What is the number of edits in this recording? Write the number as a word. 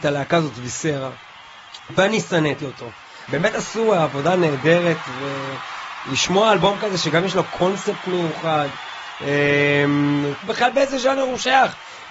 two